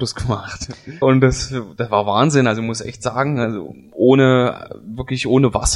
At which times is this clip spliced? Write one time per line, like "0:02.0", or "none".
0:01.0